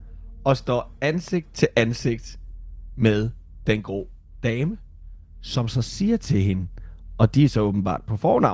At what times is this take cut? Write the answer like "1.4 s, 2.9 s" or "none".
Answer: none